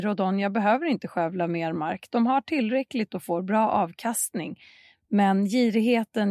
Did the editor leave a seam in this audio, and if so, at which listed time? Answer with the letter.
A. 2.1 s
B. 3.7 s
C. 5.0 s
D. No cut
D